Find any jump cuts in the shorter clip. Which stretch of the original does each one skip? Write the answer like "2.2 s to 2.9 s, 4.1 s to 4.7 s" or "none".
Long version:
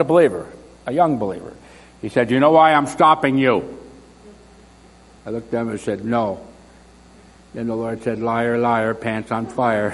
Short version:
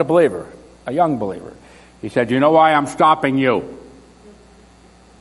none